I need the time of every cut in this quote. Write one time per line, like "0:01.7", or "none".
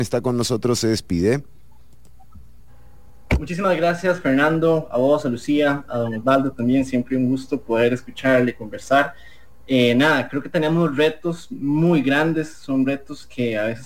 none